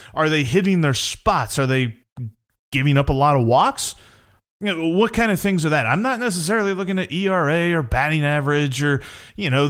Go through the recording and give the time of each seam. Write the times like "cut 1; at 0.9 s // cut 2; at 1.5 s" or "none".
none